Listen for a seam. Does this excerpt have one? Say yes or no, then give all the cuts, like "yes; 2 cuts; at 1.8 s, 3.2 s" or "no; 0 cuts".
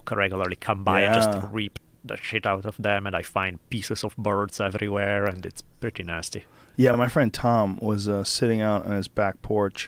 no; 0 cuts